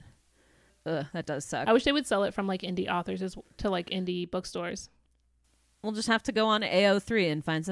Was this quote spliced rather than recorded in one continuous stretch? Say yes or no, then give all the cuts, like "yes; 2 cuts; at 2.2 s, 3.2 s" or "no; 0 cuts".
no; 0 cuts